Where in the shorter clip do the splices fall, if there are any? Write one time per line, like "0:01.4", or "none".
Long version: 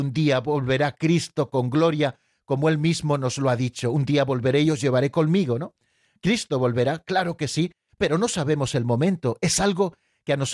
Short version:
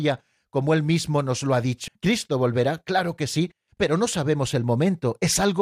0:01.9